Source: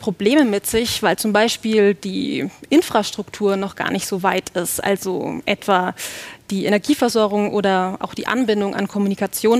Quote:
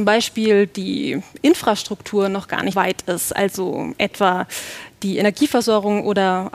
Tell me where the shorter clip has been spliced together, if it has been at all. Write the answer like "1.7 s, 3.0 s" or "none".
2.7 s